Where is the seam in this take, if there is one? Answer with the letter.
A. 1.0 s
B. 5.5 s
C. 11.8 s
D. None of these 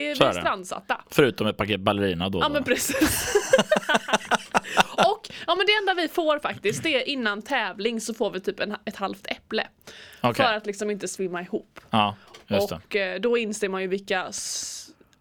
D